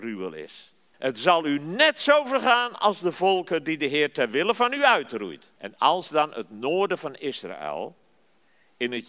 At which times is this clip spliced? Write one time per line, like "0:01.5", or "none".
0:00.9
0:05.6